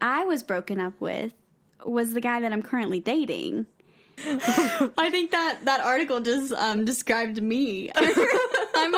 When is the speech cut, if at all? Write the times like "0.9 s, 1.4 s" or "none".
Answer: 4.2 s, 7.9 s